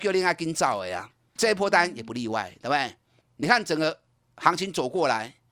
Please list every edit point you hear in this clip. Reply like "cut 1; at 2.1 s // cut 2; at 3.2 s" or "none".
cut 1; at 1.4 s // cut 2; at 3.2 s